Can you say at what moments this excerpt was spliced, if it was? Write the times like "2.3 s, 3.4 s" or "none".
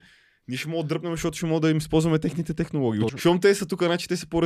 3.1 s